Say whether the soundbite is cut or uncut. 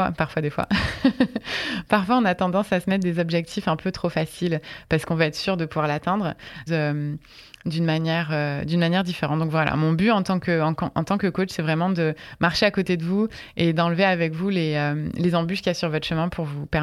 cut